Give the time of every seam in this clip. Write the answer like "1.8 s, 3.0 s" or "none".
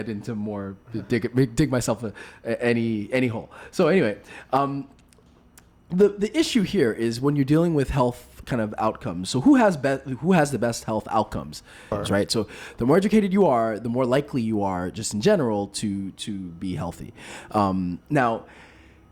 11.9 s